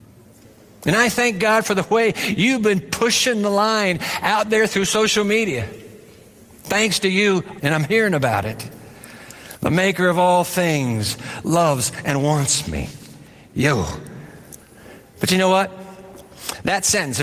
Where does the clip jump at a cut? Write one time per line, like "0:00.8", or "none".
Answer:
0:07.6